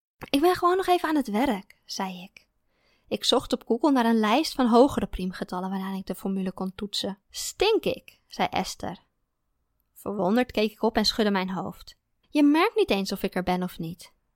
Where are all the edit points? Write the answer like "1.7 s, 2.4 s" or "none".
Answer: 7.2 s, 12.2 s